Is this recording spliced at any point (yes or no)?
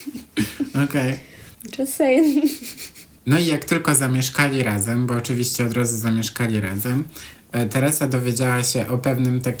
no